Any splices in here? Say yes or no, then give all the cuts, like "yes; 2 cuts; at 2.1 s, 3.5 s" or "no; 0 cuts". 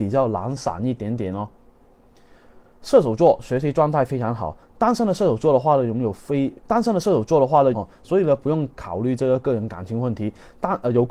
yes; 2 cuts; at 6.6 s, 7.7 s